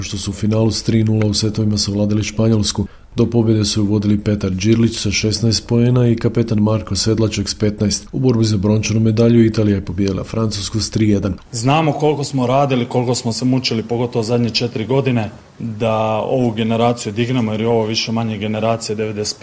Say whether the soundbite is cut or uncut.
cut